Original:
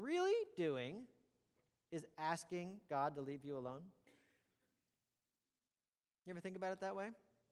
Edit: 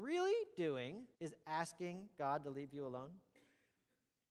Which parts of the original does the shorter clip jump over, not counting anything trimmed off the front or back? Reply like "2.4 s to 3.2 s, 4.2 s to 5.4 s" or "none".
1.1 s to 1.8 s